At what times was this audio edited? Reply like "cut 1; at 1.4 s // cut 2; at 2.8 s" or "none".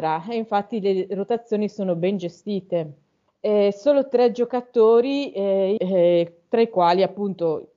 cut 1; at 3.3 s // cut 2; at 5.8 s